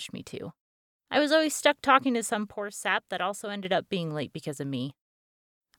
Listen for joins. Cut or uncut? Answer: cut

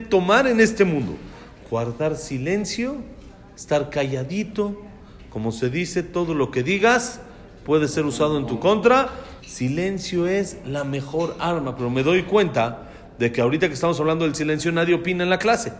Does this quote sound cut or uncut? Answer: cut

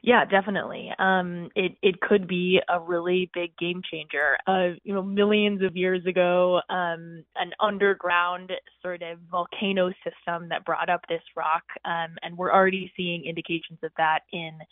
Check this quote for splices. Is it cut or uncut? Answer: cut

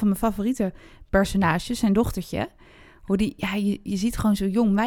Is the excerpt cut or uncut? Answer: uncut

